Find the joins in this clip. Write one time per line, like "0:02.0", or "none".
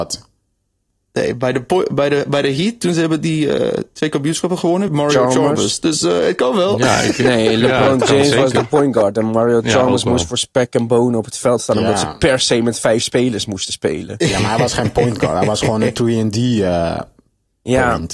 0:04.9

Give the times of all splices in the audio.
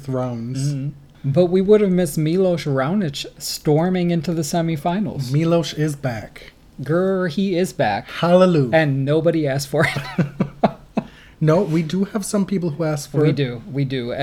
0:01.1

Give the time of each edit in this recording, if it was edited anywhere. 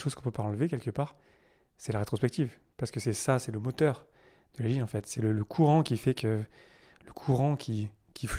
0:05.2

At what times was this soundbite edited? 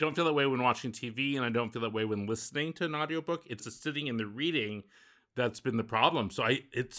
0:03.6

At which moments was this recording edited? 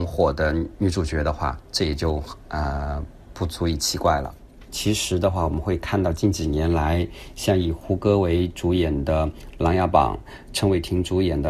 0:03.3
0:04.7

